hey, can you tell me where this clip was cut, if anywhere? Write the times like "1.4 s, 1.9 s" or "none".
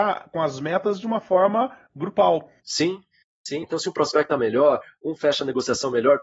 2.6 s, 3.6 s